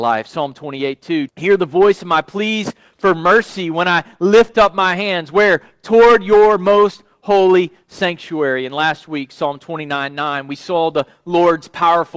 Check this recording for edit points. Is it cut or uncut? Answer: cut